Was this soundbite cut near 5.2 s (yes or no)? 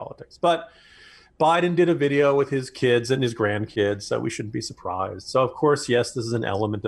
no